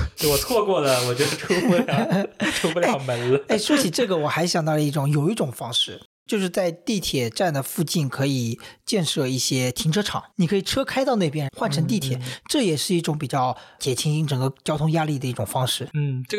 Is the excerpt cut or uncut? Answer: cut